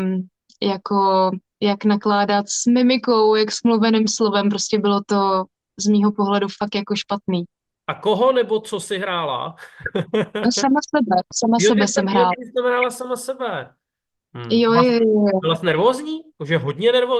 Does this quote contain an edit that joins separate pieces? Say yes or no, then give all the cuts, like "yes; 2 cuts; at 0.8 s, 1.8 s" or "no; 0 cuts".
yes; 1 cut; at 16.3 s